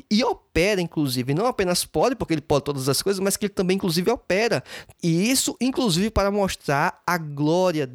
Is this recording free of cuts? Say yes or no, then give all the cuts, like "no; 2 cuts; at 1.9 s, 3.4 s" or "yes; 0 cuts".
no; 1 cut; at 4.9 s